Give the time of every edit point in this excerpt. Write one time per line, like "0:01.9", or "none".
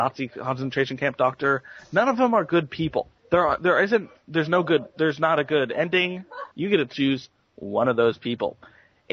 0:03.2
0:06.5